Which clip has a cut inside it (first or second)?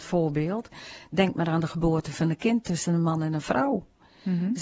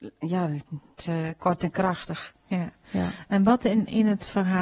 second